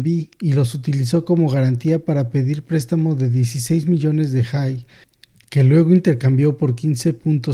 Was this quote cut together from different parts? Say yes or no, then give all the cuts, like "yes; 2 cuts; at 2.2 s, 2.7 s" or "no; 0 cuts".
no; 0 cuts